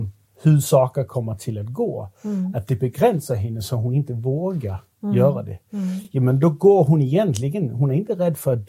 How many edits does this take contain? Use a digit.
0